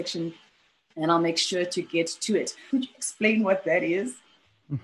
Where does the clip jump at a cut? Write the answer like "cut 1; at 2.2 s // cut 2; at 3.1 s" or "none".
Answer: cut 1; at 2.7 s